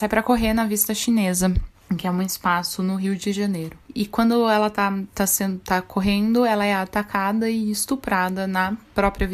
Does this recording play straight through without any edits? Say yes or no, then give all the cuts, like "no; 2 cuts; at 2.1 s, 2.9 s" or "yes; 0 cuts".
yes; 0 cuts